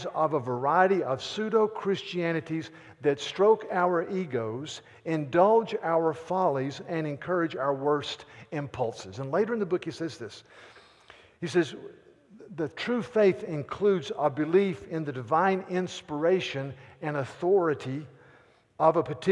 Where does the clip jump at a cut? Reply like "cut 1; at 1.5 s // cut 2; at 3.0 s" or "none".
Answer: none